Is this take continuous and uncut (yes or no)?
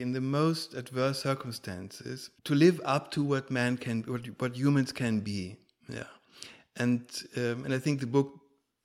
no